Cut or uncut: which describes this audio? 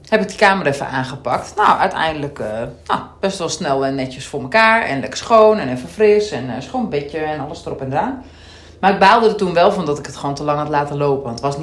uncut